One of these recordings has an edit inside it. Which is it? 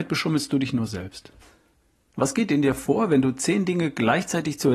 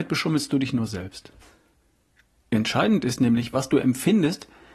first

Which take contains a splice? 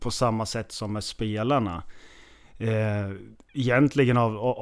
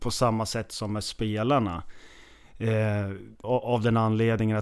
second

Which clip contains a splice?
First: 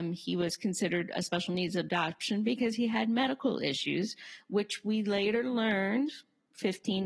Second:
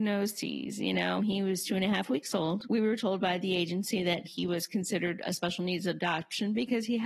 second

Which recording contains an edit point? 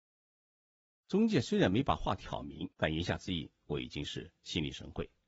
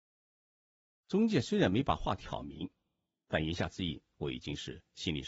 first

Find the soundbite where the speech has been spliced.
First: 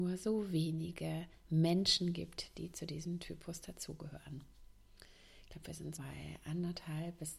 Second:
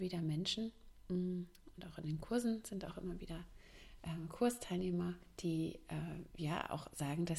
first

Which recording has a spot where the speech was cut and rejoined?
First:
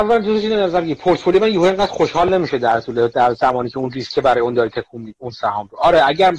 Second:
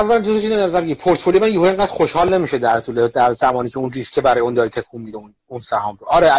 first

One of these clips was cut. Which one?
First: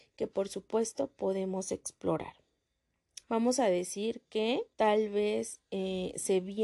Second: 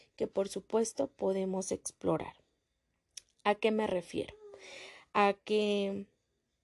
first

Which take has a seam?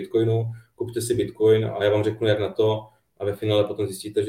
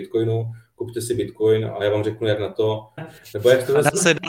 second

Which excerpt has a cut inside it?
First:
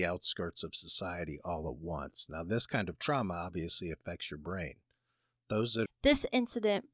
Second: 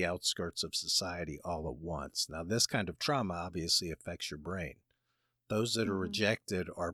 first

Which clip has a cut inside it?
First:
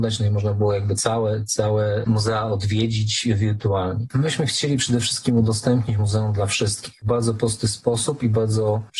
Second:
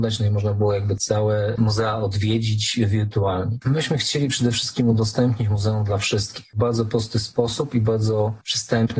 second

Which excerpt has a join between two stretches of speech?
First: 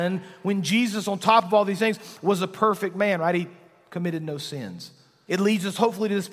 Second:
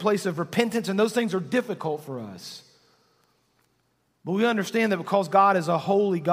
first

